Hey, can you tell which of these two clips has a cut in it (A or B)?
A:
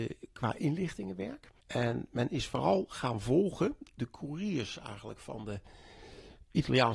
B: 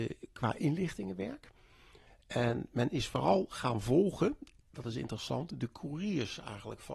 A